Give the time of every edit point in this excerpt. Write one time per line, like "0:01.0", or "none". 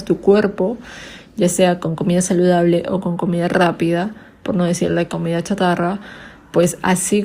none